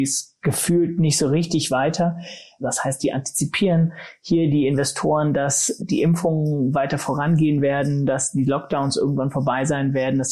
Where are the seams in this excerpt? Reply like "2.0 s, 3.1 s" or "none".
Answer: 2.6 s, 5.8 s